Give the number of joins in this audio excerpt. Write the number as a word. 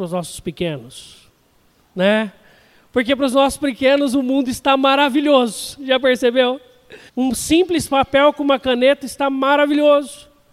one